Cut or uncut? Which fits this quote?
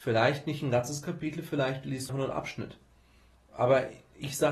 cut